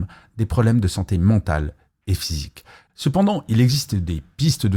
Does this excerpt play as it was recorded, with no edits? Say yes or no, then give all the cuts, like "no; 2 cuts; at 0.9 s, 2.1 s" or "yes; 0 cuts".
no; 1 cut; at 2.9 s